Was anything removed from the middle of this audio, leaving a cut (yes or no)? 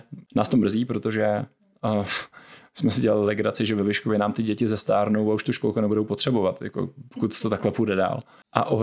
no